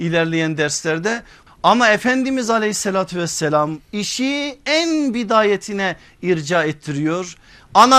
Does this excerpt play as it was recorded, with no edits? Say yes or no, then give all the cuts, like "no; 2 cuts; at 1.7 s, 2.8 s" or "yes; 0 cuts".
no; 1 cut; at 1.5 s